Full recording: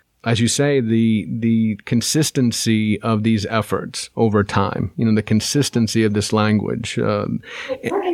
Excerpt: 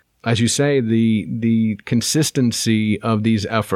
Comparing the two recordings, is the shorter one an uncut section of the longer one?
yes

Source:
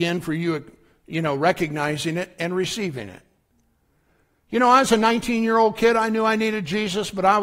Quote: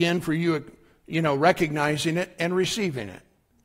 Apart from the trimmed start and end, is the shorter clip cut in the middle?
no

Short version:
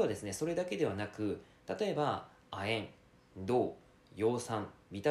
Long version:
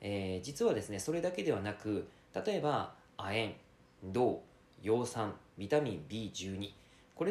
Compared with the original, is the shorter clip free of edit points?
yes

